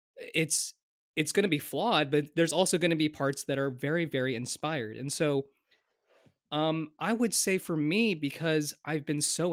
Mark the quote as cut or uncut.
uncut